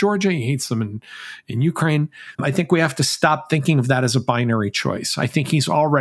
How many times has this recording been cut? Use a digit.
1